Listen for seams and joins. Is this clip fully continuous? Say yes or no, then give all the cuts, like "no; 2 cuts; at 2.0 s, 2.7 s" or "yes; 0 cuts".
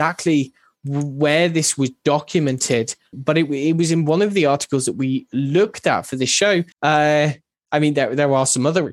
no; 2 cuts; at 3.1 s, 6.7 s